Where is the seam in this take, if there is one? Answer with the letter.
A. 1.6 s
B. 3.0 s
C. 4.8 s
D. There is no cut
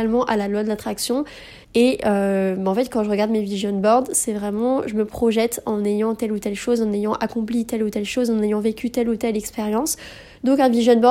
A